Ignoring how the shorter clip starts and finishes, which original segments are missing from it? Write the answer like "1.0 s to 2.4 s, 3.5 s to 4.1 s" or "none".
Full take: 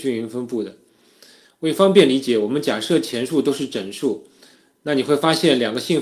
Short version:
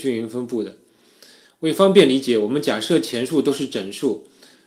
none